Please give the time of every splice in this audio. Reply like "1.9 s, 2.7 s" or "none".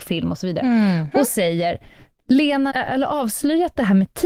1.1 s, 2.7 s